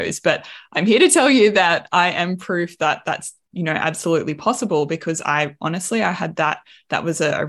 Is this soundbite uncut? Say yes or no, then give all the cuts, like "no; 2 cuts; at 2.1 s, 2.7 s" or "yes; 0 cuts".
yes; 0 cuts